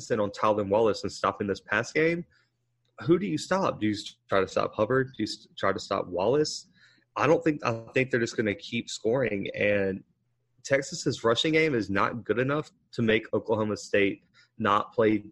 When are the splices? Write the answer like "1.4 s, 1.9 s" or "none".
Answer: none